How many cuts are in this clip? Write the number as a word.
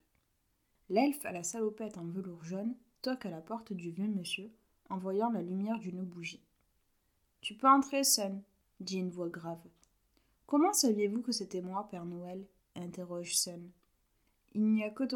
zero